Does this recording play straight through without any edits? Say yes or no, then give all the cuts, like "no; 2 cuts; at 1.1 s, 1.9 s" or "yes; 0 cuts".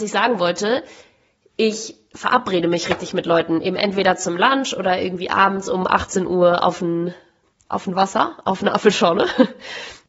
no; 1 cut; at 7.7 s